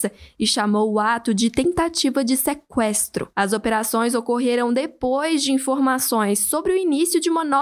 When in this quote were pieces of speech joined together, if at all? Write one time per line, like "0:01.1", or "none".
none